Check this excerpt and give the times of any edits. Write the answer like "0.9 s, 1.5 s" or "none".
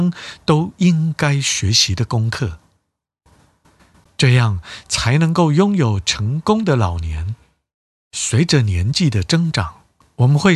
4.0 s

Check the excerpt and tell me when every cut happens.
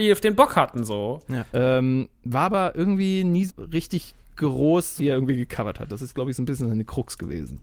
1.5 s, 3.5 s, 5.0 s

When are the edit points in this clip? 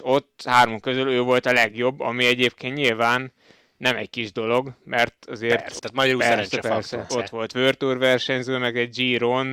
5.8 s, 7.1 s

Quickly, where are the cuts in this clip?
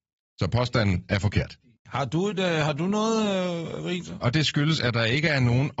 1.8 s, 4.2 s

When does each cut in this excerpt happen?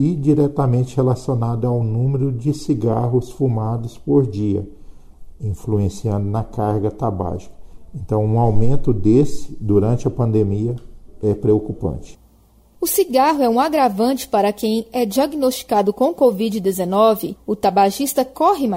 none

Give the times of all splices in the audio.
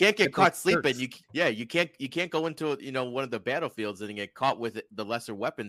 1.2 s

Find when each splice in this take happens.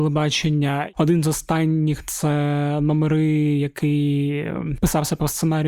0.9 s

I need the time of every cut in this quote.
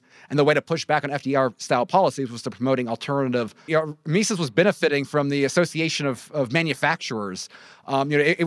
3.7 s

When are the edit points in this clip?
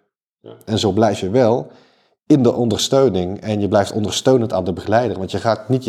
none

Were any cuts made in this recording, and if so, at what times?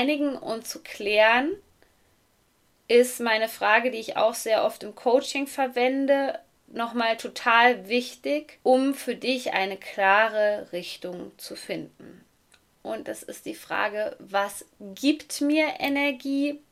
8.6 s

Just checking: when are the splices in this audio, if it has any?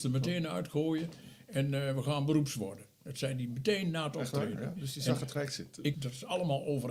5.9 s

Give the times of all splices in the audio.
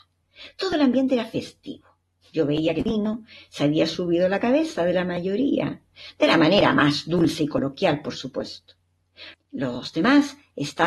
9.3 s

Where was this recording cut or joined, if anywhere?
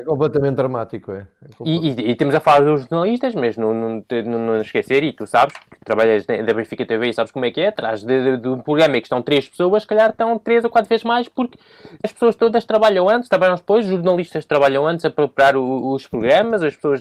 12.0 s

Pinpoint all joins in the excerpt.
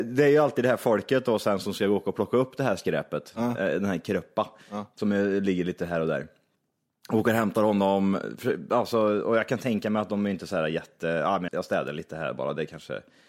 11.5 s

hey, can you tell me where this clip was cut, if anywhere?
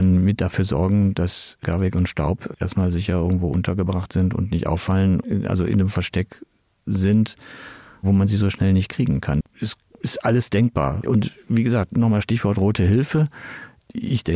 9.4 s, 11.0 s

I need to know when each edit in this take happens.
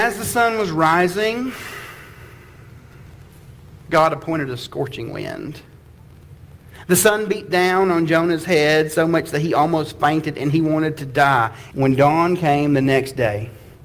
11.7 s

